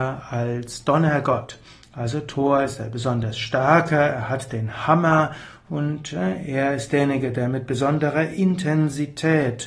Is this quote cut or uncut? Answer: uncut